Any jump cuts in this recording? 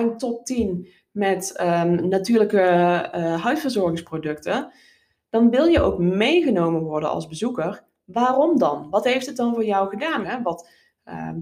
yes; 1 cut; at 10.2 s

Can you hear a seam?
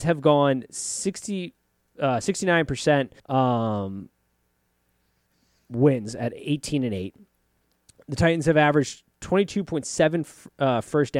yes; 1 cut; at 3.2 s

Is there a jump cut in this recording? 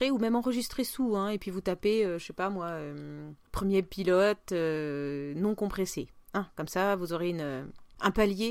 no; 0 cuts

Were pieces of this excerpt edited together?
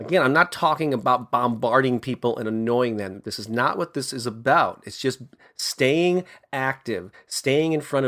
no; 0 cuts

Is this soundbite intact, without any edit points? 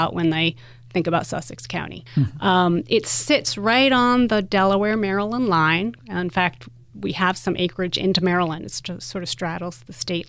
yes; 0 cuts

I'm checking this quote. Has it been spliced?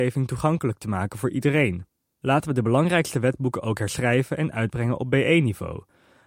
no; 0 cuts

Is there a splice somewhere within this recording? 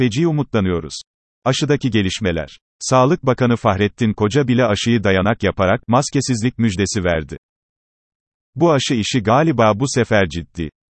yes; 1 cut; at 1.3 s

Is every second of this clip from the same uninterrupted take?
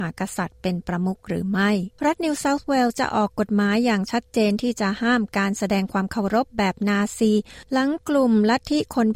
no; 1 cut; at 2.0 s

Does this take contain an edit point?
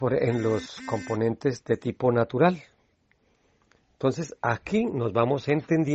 no; 0 cuts

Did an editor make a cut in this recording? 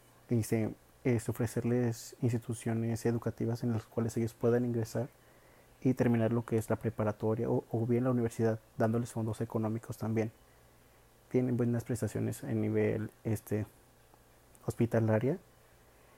no; 0 cuts

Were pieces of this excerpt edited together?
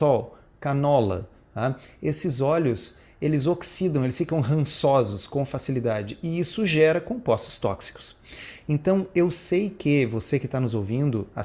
no; 0 cuts

